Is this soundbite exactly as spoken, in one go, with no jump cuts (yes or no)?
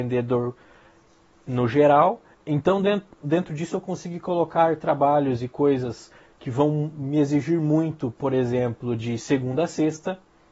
no